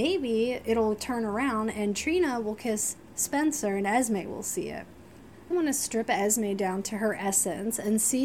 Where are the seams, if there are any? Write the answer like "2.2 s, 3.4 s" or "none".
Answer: 5.5 s